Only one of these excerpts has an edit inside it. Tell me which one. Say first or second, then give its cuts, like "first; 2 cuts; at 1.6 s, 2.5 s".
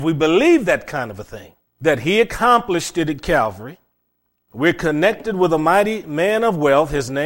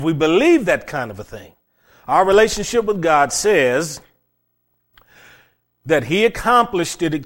first; 1 cut; at 1.7 s